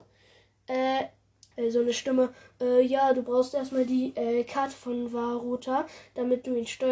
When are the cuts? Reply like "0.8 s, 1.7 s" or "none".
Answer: 1.5 s